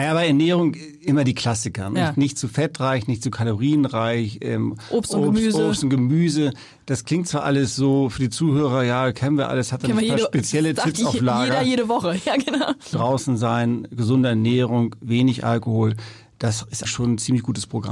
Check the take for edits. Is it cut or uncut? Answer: cut